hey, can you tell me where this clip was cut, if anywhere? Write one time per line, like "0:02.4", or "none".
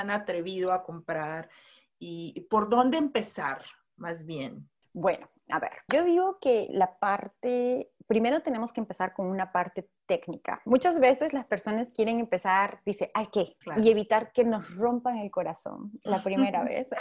0:05.9
0:13.6